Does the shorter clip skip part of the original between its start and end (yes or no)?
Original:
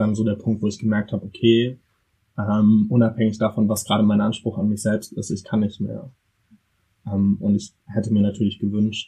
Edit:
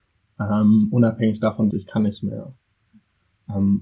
yes